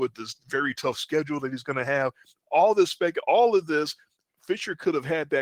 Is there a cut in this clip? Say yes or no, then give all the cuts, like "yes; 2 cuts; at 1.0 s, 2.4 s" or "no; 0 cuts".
no; 0 cuts